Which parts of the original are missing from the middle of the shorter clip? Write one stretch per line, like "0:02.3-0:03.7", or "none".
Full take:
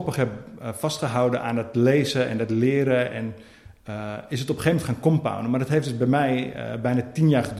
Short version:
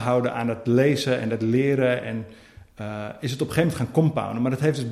none